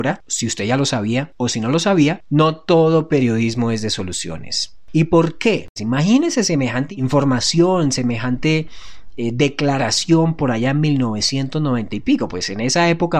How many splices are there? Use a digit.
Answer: 1